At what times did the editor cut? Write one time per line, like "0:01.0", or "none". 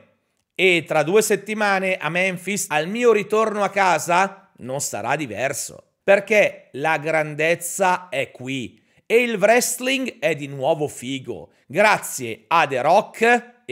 0:02.7
0:06.0